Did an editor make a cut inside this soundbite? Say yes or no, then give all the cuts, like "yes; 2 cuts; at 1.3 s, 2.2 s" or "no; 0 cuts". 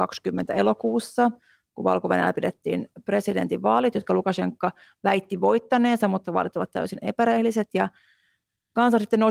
no; 0 cuts